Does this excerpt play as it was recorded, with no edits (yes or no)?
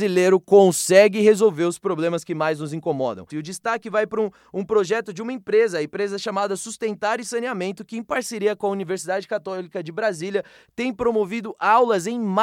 no